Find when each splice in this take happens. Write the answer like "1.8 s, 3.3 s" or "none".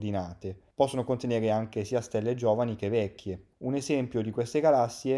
none